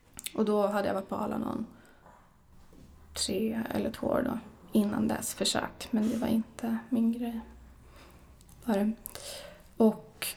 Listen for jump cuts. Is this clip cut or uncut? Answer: uncut